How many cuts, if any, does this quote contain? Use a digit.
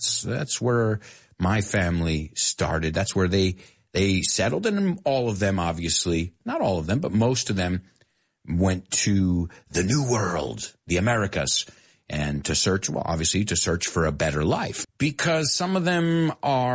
1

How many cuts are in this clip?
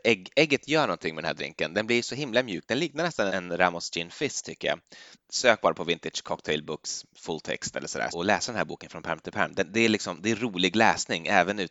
3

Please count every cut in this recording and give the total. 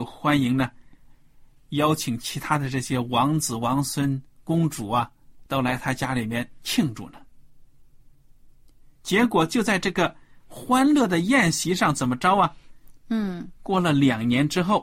2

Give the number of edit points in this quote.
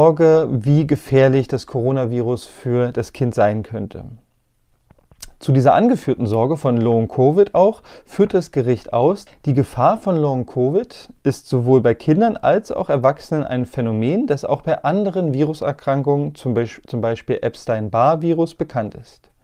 1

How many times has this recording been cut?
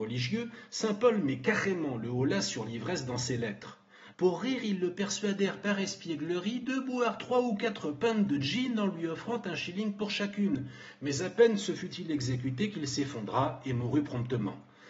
1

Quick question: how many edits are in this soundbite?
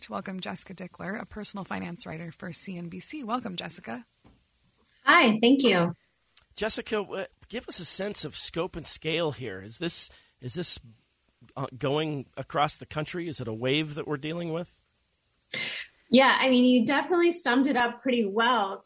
0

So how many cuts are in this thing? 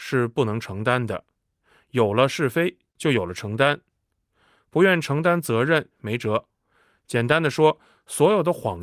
2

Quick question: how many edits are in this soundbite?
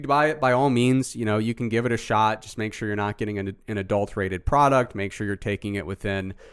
0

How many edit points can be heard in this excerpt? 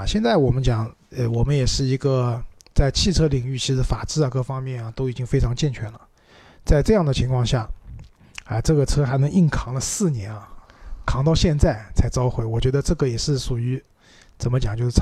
1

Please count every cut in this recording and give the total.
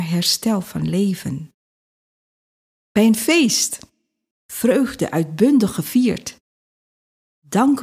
1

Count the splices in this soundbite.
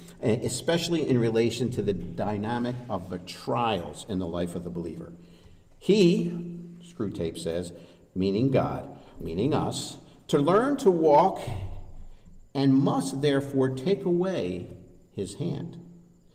2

